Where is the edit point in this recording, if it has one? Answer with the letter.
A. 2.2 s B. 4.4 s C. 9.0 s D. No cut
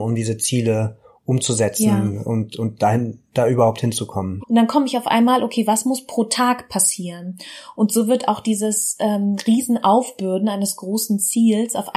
B